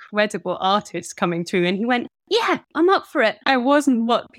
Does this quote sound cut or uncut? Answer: cut